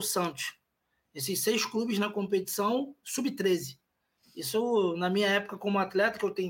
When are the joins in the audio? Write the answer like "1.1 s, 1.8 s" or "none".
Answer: none

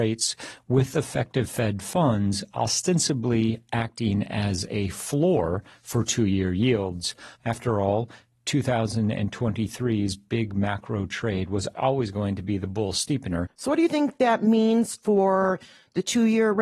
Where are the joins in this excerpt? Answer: 7.4 s, 13.5 s

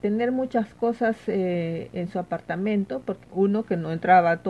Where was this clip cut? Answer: 3.2 s

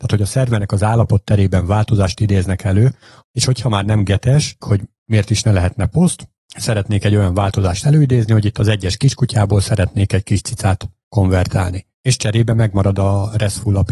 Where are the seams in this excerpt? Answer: 3.2 s, 4.6 s, 11.9 s

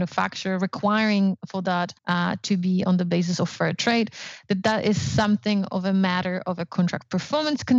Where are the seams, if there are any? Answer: 2.0 s

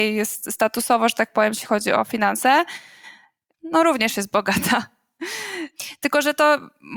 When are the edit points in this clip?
3.6 s

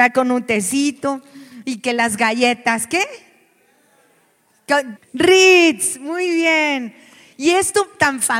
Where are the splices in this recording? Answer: 5.0 s

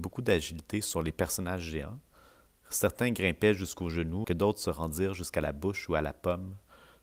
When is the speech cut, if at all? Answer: 4.2 s

